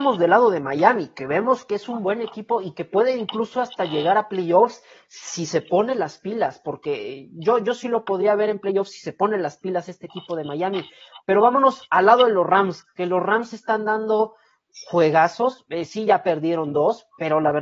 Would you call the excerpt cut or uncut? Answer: uncut